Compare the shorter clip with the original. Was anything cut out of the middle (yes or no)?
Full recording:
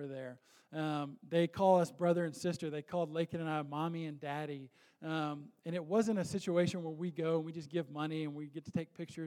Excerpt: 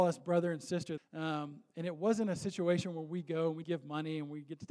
yes